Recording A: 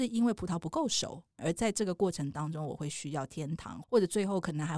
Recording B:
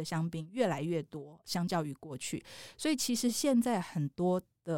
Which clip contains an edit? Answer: A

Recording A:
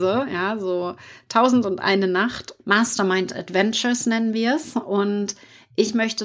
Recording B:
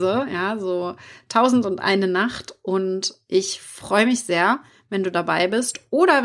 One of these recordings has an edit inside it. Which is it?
A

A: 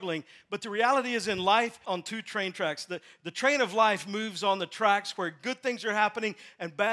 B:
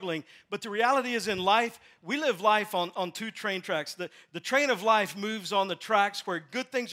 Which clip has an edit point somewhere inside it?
A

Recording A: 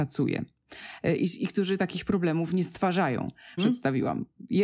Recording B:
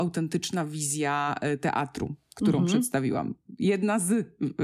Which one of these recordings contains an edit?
A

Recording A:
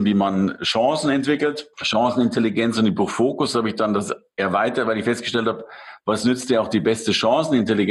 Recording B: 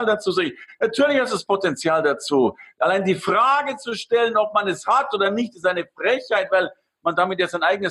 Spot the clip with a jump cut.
A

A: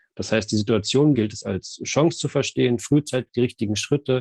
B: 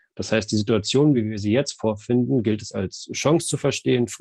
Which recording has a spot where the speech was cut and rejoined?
A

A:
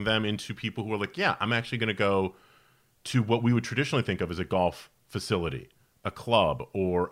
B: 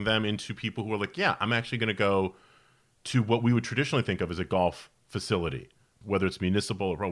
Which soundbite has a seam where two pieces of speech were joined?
B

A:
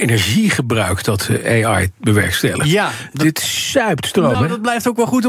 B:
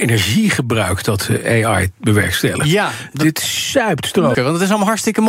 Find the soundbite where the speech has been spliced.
B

